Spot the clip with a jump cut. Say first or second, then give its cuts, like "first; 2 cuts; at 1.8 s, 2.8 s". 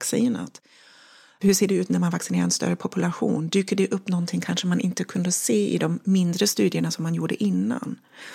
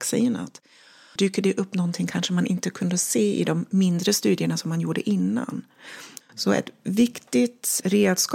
second; 2 cuts; at 1.2 s, 6.2 s